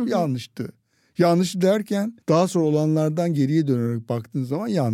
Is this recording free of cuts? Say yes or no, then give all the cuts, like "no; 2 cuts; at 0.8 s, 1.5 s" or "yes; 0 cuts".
no; 1 cut; at 2.2 s